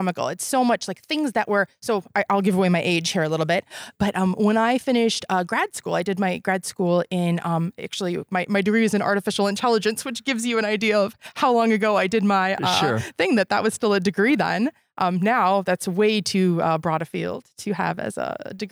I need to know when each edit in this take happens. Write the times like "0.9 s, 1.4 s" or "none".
none